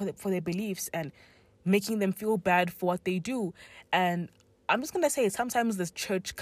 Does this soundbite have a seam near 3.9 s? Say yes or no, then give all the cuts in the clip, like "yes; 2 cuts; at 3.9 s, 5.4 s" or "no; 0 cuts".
no; 0 cuts